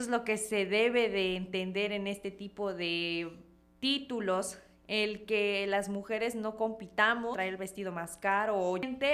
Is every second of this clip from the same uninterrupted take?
yes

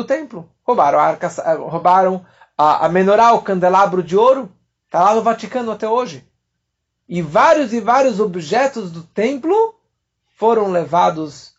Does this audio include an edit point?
no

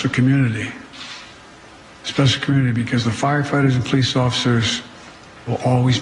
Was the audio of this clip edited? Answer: no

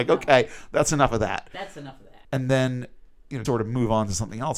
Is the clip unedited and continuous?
no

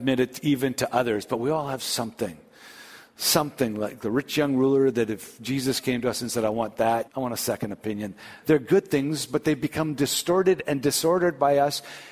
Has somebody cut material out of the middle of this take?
yes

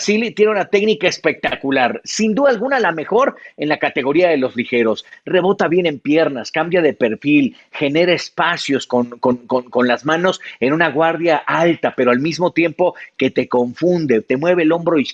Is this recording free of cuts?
yes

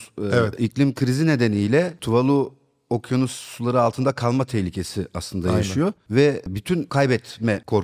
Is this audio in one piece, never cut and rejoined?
yes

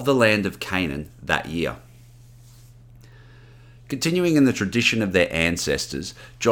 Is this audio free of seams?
yes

